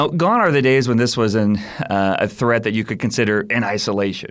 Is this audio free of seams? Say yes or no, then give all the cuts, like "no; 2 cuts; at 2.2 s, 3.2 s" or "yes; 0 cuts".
yes; 0 cuts